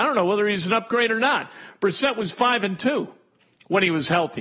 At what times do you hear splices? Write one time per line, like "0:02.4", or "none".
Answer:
none